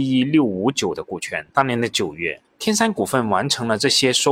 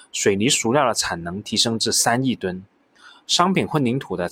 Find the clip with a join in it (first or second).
first